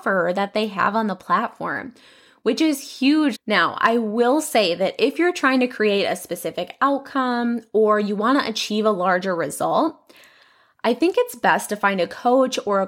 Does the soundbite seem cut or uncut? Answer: cut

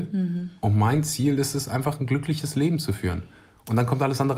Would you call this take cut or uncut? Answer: uncut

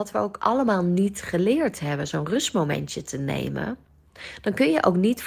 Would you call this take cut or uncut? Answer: uncut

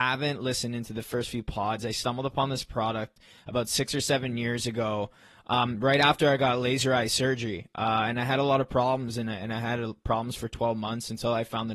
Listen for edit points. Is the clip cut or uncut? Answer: uncut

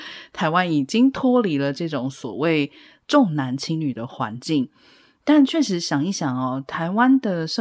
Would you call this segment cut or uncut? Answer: uncut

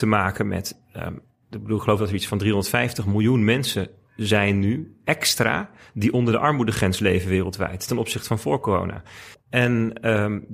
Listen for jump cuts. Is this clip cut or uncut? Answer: cut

